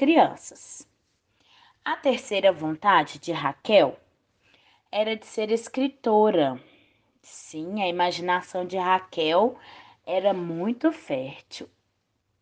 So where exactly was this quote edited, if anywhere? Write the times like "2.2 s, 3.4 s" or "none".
none

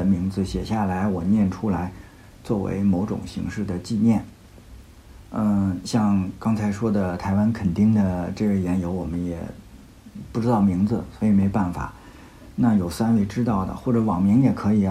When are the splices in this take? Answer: none

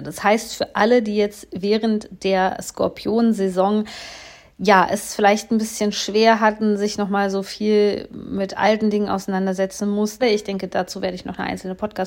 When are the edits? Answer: 10.2 s

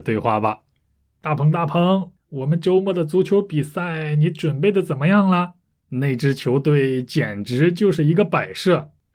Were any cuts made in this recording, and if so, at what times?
5.8 s

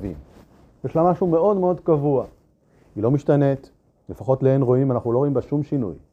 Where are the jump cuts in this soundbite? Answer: none

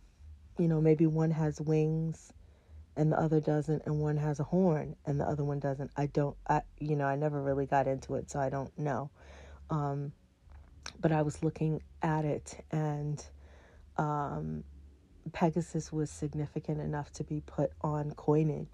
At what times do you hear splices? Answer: none

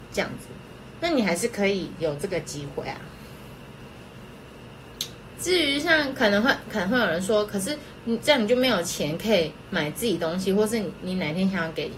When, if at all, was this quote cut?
5.4 s

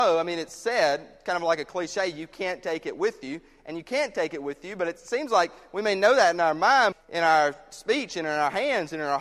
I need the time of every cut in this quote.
6.9 s

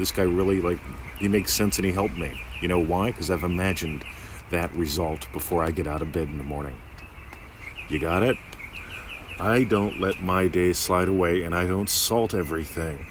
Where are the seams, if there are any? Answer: none

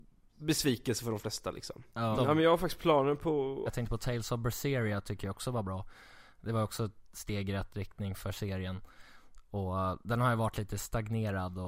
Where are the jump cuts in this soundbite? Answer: 2.1 s, 3.7 s

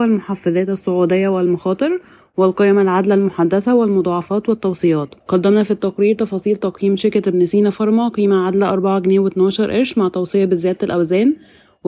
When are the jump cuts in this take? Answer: 5.2 s

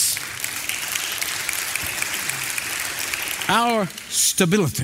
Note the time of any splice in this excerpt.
none

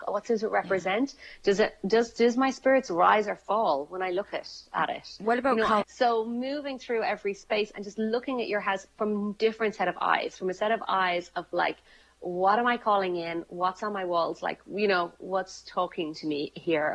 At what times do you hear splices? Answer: 5.8 s

